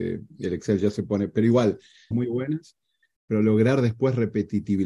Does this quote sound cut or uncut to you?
cut